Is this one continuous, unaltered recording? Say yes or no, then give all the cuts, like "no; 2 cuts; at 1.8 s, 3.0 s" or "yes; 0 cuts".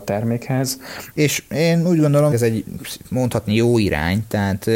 no; 2 cuts; at 1.1 s, 2.3 s